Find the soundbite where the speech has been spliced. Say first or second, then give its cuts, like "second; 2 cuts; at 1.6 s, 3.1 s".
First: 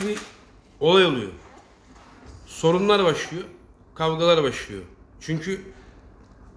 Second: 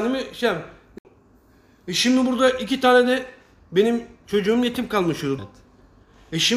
second; 1 cut; at 5.4 s